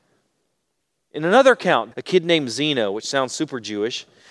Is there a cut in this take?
yes; 1 cut; at 1.9 s

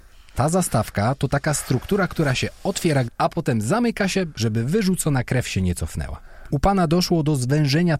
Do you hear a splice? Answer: yes; 2 cuts; at 3.1 s, 6.5 s

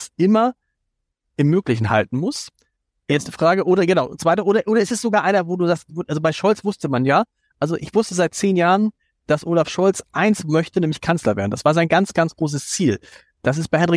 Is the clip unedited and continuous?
yes; 0 cuts

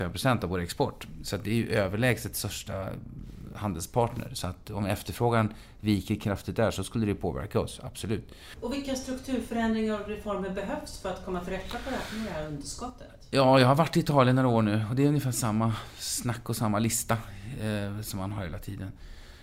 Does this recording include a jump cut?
yes; 1 cut; at 8.5 s

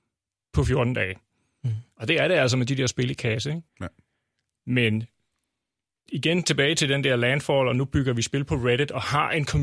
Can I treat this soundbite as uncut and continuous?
no; 1 cut; at 3.7 s

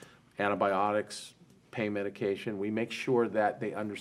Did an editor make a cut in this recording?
no; 0 cuts

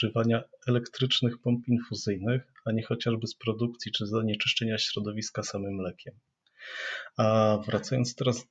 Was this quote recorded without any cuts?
yes; 0 cuts

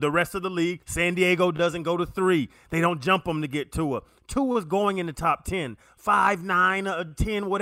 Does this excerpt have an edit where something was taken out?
no; 0 cuts

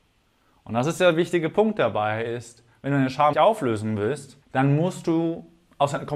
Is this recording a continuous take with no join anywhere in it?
no; 2 cuts; at 3.3 s, 4.4 s

